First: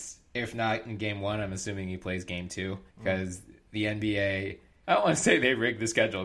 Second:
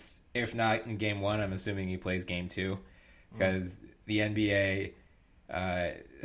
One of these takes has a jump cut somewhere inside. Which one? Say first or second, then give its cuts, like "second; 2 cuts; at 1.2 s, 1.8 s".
first; 2 cuts; at 2.9 s, 4.8 s